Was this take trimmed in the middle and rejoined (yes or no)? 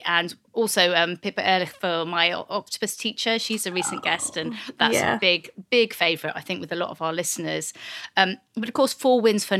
no